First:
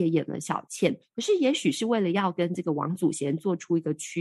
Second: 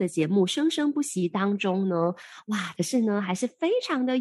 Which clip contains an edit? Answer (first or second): second